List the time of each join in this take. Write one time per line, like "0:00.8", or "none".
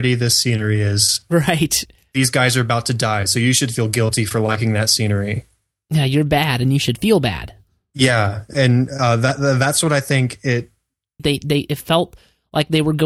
0:01.9
0:11.2